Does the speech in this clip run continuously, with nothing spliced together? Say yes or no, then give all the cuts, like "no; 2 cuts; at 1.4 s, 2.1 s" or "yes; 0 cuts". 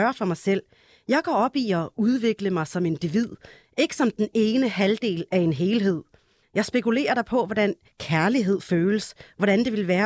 no; 1 cut; at 6.4 s